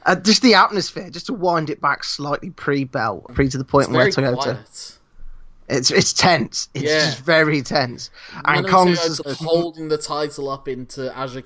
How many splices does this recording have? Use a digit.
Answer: 2